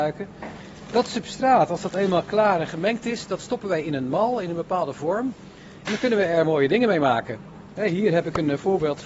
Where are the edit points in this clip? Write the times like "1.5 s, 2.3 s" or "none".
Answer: none